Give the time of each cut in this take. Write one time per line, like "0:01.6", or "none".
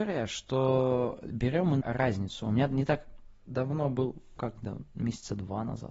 0:01.8
0:04.4